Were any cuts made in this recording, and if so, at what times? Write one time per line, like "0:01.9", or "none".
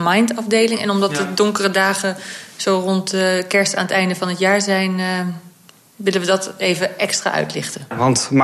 none